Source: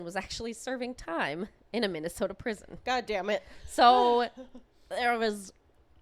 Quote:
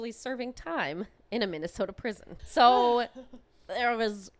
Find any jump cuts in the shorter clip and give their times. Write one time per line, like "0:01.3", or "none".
0:02.4